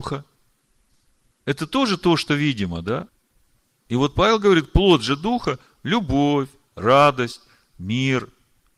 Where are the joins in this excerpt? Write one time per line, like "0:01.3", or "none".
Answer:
none